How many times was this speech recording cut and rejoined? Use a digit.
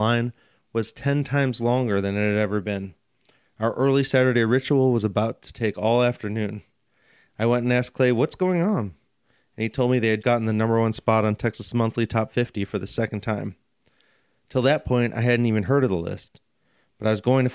1